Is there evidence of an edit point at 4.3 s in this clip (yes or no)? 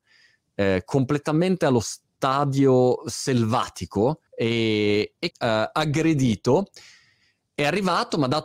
yes